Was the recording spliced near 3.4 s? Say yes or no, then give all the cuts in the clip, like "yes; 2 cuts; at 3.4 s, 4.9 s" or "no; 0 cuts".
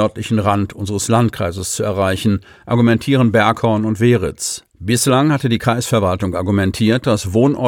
no; 1 cut; at 4.7 s